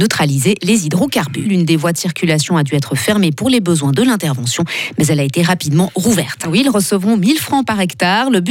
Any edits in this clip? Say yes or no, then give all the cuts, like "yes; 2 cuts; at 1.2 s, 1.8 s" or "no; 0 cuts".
yes; 2 cuts; at 1.4 s, 6.4 s